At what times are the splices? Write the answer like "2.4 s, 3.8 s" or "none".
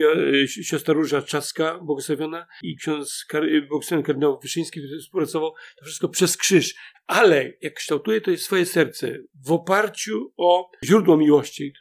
6.9 s